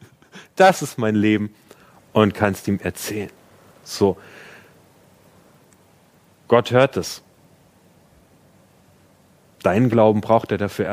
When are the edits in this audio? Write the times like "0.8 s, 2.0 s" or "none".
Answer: none